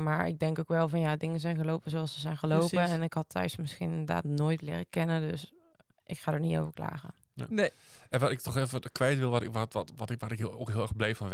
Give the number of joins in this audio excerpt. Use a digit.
0